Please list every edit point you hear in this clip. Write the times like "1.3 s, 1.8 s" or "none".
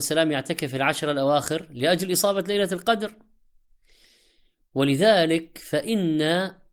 none